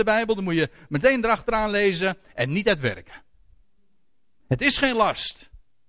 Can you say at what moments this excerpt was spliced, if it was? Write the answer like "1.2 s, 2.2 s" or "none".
4.4 s

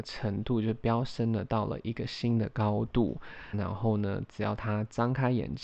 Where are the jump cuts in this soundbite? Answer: 3.5 s

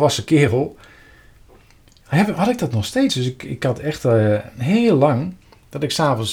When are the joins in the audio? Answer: none

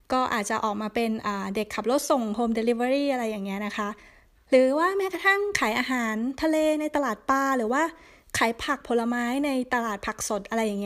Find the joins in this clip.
none

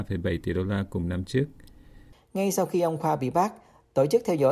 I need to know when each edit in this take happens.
2.1 s

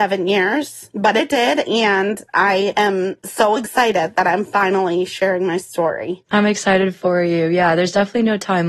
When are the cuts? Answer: none

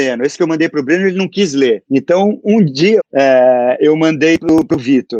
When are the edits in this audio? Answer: 1.8 s, 3.0 s

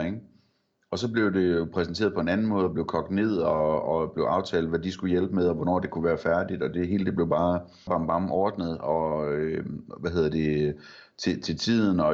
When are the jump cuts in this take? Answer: 7.9 s

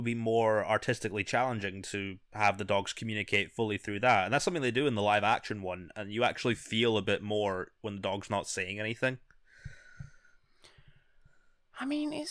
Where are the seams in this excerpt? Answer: none

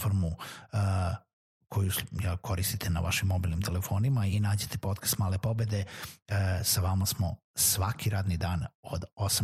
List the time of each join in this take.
none

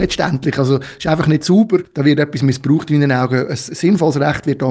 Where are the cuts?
none

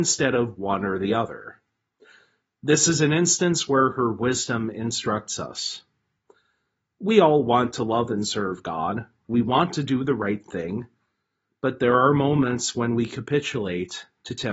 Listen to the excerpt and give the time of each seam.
none

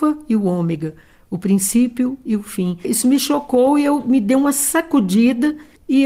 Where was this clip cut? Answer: 2.8 s

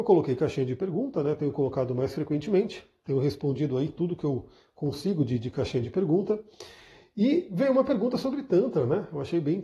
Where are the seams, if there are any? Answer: none

